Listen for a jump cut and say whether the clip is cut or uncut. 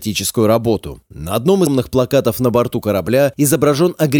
cut